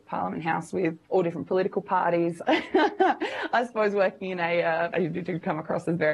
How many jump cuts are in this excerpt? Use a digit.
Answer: 3